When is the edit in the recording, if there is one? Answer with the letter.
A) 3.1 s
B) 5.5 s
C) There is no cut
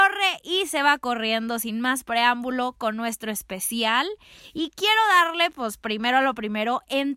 C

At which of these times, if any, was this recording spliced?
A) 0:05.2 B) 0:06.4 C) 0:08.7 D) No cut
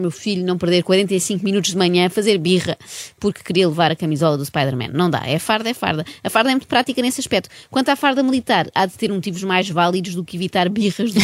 C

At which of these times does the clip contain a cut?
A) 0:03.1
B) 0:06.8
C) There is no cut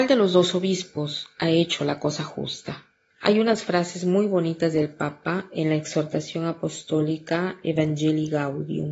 A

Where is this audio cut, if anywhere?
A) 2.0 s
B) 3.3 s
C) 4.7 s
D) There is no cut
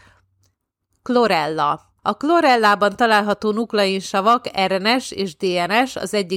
A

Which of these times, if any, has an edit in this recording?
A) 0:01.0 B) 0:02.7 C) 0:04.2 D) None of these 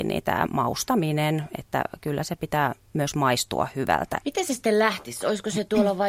C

